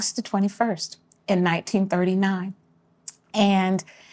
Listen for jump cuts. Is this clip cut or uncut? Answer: uncut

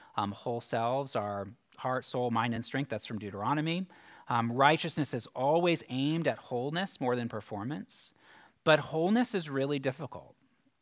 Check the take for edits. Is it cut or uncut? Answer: uncut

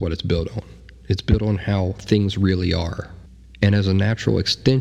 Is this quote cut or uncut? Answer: uncut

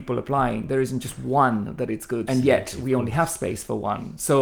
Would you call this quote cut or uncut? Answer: cut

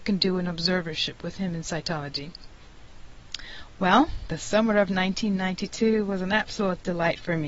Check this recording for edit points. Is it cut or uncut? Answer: uncut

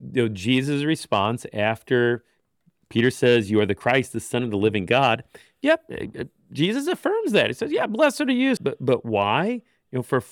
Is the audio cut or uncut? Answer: cut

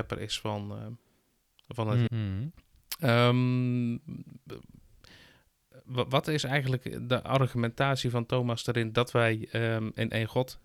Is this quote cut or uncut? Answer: cut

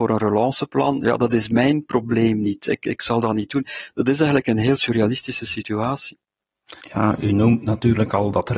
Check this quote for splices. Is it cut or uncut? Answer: cut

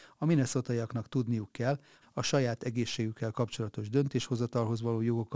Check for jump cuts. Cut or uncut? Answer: cut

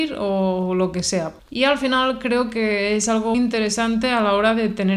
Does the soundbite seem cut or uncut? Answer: cut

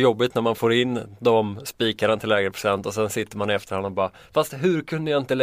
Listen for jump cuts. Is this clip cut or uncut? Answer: uncut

